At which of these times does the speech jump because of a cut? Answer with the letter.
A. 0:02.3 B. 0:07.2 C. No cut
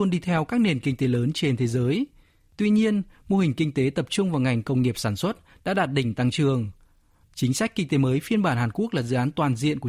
B